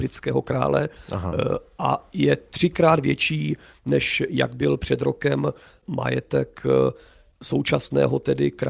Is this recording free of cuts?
yes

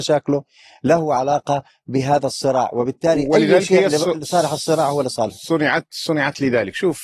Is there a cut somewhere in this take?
no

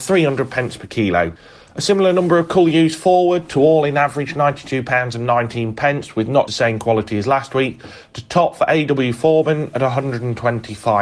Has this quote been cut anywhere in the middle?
yes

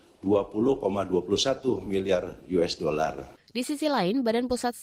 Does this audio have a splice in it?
no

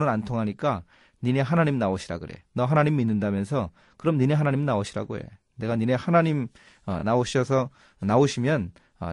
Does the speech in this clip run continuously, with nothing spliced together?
yes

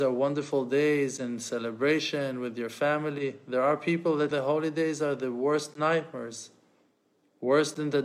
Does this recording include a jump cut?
yes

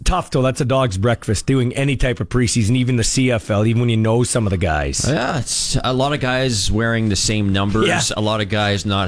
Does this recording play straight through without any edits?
yes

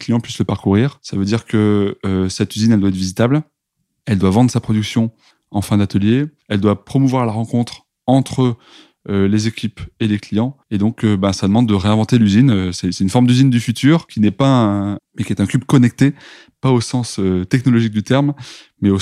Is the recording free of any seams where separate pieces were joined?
no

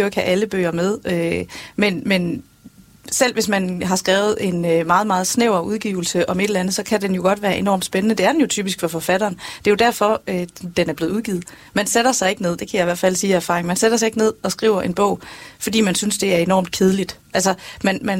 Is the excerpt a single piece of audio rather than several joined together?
no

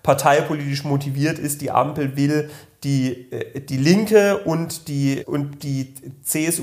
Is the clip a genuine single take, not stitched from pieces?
no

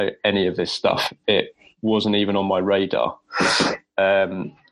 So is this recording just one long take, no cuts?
yes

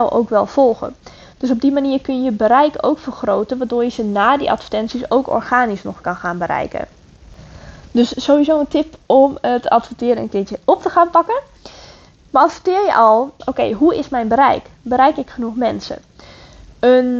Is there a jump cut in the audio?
yes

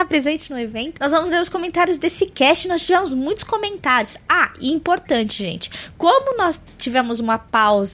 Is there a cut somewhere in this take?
no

